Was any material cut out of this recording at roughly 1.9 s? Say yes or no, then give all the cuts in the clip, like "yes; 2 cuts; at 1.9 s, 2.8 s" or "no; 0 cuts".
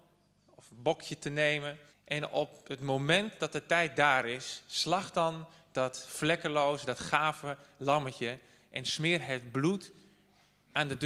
yes; 1 cut; at 1.9 s